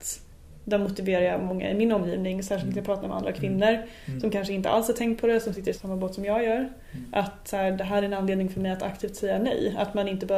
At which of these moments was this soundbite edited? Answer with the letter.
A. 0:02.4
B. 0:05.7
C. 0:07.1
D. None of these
B